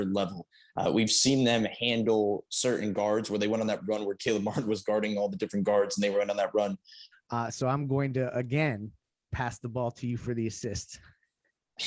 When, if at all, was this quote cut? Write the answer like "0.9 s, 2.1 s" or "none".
7.1 s, 9.2 s